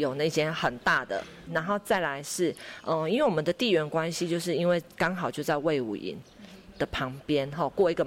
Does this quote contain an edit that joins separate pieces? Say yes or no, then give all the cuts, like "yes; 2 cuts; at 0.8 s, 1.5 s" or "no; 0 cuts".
yes; 1 cut; at 1.5 s